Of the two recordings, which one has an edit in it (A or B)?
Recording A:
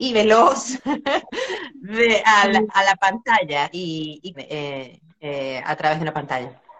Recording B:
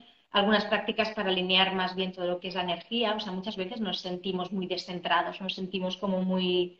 A